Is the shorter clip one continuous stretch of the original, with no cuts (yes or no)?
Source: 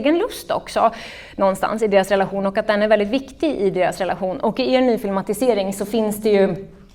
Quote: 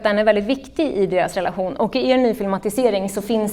yes